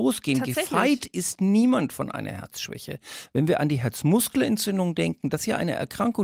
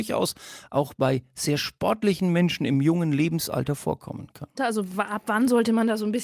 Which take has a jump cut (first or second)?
second